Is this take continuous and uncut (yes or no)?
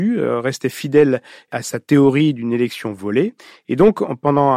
yes